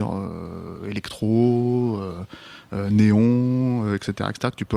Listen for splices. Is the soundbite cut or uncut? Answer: uncut